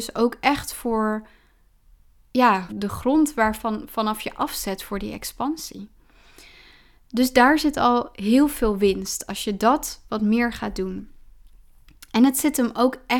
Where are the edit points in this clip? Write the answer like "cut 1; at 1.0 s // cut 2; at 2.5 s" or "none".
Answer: cut 1; at 2.7 s